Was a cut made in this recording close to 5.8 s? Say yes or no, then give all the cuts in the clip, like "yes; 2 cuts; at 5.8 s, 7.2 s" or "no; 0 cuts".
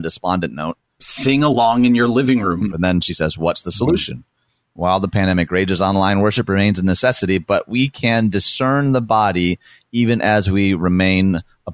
no; 2 cuts; at 1.0 s, 2.7 s